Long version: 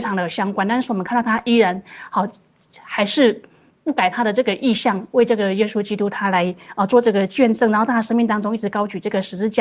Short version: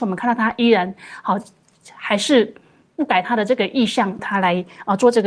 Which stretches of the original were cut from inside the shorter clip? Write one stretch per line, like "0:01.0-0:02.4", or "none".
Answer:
0:05.1-0:06.1